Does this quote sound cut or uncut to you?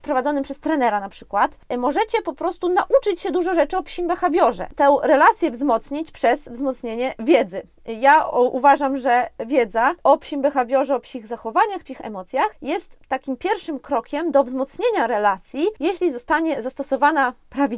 uncut